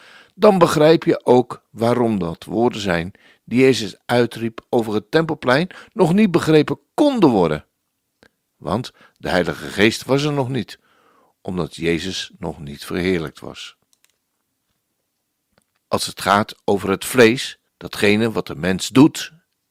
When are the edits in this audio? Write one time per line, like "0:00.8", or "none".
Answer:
0:15.8
0:17.7